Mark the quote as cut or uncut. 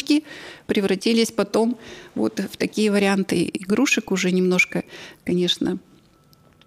uncut